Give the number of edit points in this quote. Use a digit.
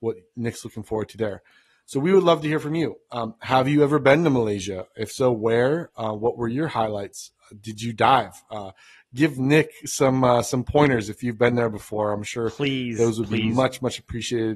0